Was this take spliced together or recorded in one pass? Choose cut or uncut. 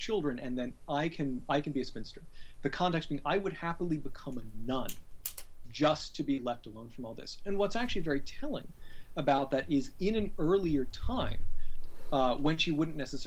uncut